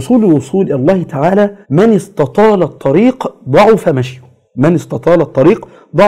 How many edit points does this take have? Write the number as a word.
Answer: one